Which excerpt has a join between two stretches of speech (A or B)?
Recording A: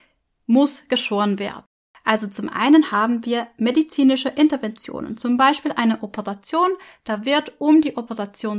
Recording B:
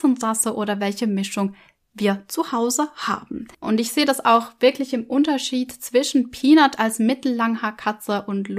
B